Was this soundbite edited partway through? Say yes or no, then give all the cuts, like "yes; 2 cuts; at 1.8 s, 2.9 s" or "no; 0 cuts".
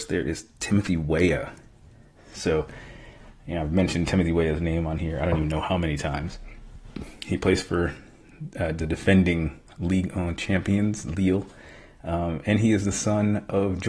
no; 0 cuts